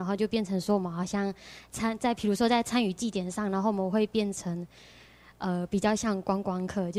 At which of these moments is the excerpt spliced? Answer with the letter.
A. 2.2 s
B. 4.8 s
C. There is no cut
C